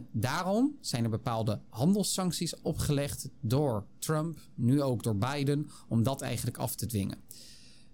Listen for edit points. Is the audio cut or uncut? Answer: uncut